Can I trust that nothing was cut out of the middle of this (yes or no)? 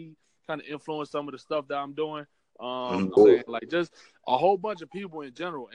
no